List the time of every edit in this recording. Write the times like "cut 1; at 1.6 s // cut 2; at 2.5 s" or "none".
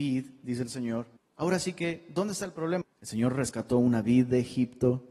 cut 1; at 1.2 s // cut 2; at 2.8 s